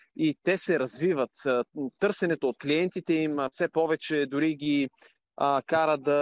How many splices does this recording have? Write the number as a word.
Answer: zero